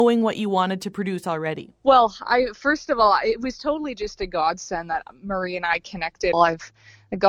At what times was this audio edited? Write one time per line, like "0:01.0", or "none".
0:06.3